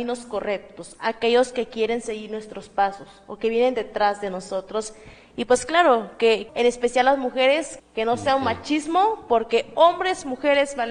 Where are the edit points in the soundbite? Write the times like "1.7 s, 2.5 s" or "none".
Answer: 6.5 s, 7.8 s